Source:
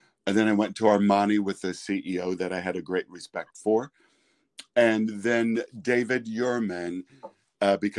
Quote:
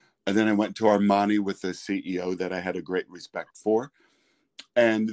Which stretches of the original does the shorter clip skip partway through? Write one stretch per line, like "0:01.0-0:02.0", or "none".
none

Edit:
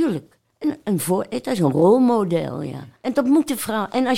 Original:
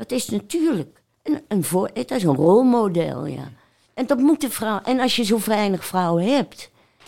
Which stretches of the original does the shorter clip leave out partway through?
0:03.6-0:03.9

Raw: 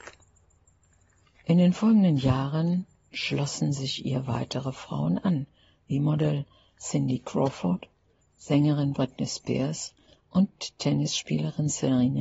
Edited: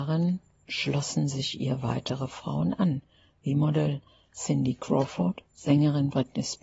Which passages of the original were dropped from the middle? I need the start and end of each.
0:07.9-0:08.3

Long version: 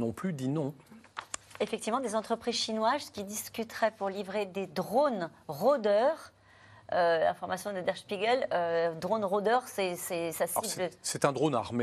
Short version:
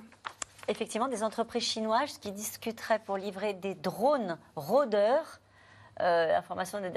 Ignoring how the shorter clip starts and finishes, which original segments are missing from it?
none

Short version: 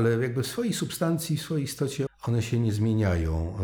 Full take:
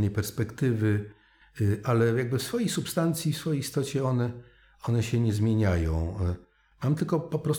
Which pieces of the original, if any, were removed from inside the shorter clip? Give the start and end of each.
0:04.0-0:04.7

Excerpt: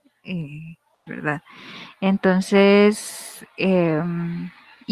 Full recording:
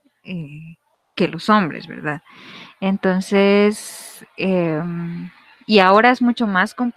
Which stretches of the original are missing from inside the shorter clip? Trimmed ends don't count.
0:01.1-0:01.9

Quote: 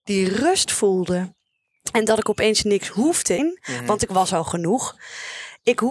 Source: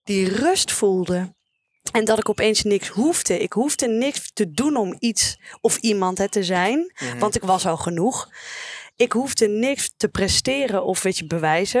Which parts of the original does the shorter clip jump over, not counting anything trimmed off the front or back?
0:03.4-0:06.7

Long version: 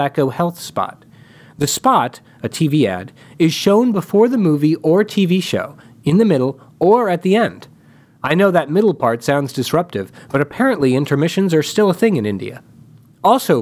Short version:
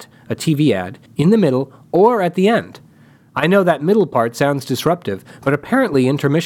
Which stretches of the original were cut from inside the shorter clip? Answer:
0:03.2-0:05.9

